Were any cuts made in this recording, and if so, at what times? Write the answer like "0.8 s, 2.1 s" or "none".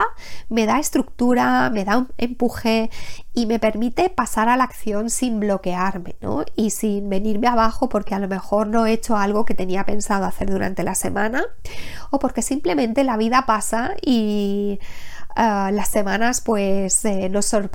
none